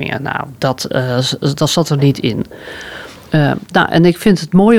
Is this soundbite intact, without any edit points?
yes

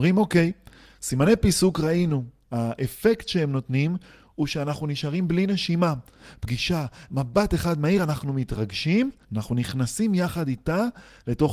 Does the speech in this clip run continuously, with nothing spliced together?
no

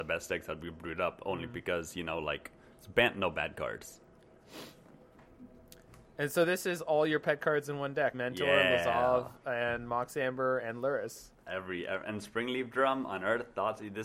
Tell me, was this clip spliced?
yes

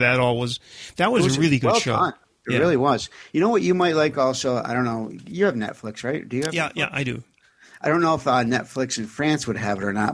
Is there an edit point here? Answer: no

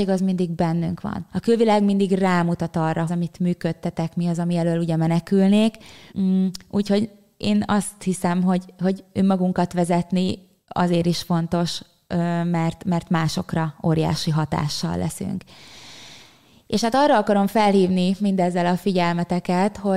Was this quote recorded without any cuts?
no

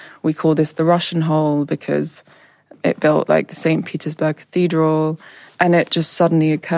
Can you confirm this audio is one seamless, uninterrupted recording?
no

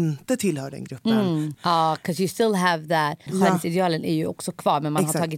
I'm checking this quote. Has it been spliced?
yes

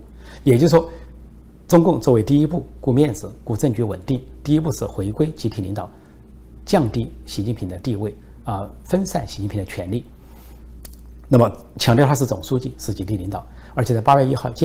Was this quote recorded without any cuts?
yes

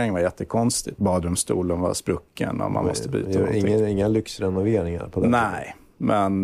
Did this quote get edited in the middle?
yes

